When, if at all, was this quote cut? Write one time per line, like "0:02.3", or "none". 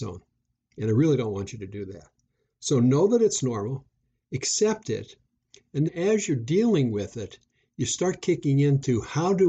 0:05.9